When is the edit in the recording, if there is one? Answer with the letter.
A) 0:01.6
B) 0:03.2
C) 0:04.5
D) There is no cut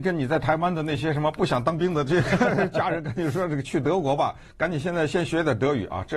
D